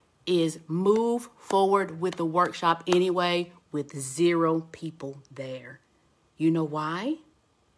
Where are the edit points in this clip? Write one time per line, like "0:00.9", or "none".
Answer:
none